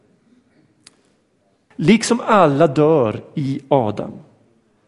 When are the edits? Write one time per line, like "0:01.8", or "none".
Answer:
0:01.7